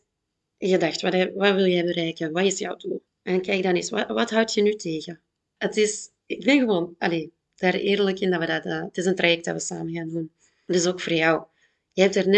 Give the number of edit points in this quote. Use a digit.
1